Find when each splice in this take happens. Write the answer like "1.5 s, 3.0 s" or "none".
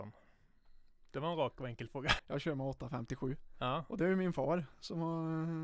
2.2 s